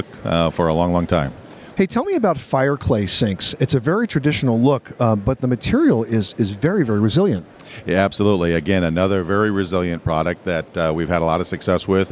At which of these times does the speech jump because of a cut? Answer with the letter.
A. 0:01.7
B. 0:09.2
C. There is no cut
A